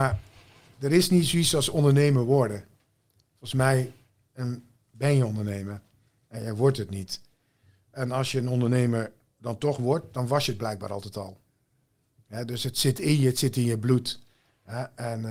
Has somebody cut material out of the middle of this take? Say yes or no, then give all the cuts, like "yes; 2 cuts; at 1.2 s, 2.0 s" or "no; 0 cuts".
no; 0 cuts